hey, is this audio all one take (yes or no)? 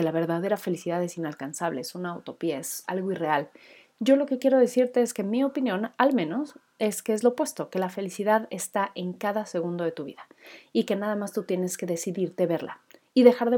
yes